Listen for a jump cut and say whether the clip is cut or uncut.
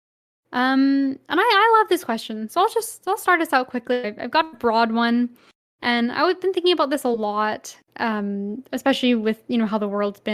cut